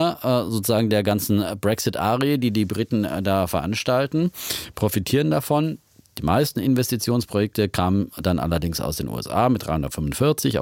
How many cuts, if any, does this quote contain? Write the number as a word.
zero